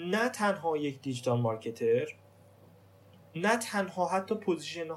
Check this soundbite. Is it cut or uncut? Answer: uncut